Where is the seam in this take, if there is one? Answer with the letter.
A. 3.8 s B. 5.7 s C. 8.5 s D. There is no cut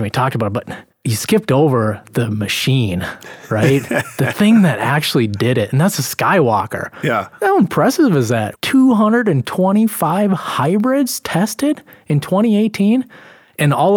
C